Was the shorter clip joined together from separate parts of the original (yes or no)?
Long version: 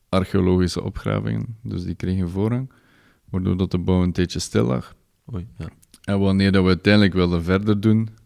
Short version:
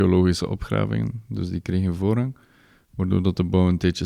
no